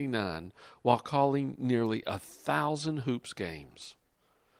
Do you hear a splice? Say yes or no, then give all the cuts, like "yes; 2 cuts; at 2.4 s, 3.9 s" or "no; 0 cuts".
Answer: no; 0 cuts